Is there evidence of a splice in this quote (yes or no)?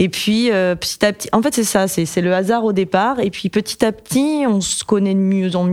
no